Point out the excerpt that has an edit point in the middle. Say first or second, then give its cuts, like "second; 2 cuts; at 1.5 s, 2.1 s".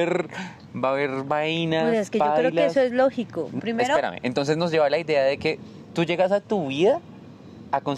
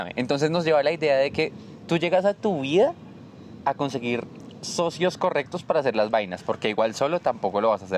first; 1 cut; at 3.6 s